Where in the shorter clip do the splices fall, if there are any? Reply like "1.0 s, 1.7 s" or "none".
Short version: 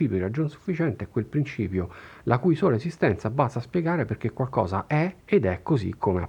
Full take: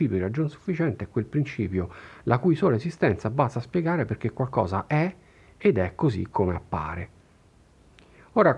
5.2 s